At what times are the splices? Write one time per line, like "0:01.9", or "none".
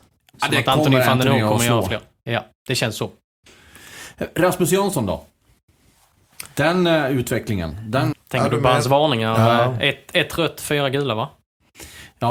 0:08.1